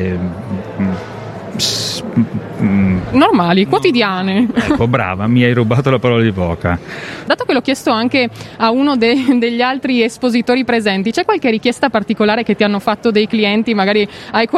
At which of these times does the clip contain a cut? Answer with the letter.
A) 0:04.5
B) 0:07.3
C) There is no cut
B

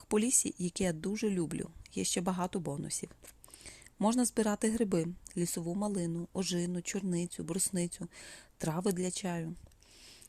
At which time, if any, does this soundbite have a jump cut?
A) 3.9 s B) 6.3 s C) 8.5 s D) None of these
D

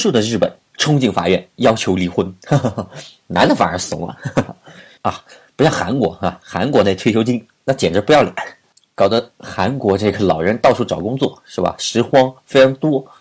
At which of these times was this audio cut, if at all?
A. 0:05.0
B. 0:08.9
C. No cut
A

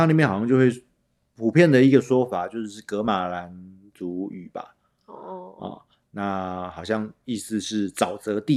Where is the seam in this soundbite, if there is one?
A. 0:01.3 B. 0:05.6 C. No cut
C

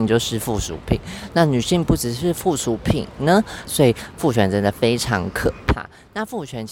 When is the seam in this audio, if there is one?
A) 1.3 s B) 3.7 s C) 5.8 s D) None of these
B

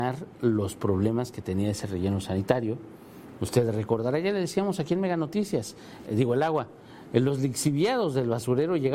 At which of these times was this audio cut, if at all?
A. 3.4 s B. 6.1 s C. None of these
B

